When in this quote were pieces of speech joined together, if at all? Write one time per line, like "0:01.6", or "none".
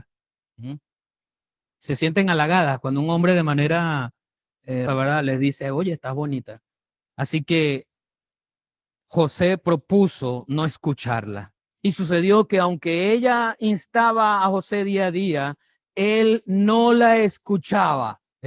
0:04.9
0:07.0
0:11.7